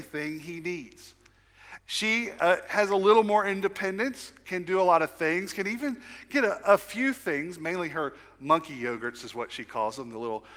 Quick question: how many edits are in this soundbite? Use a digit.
1